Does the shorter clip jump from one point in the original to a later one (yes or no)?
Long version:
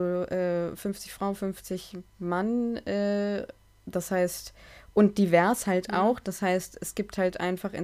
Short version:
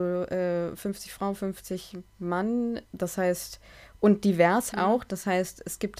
yes